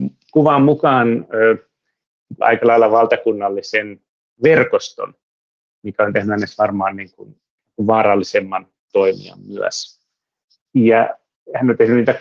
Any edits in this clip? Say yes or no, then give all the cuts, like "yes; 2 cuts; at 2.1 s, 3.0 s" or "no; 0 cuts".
yes; 1 cut; at 2.4 s